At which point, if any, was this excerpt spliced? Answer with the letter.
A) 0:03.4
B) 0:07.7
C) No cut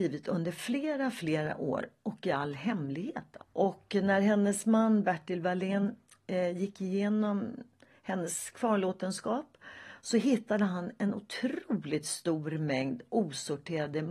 A